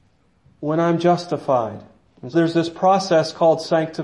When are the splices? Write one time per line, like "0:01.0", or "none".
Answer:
0:02.3